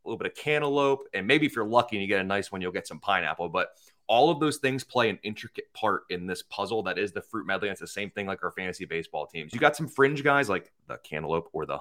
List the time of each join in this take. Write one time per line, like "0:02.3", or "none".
0:09.5